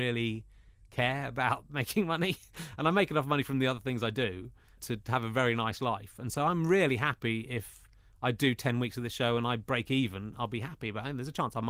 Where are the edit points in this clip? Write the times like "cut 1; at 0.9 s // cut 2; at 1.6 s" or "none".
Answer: none